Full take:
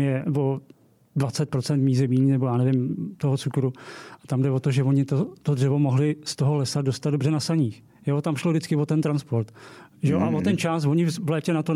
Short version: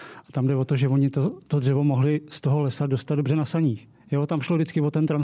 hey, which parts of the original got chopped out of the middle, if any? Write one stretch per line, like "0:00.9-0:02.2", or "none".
none